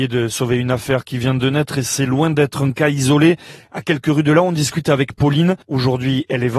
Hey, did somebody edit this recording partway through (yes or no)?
yes